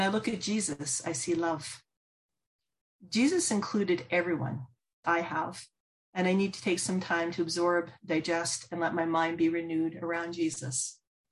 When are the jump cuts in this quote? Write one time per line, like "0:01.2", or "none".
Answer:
0:05.0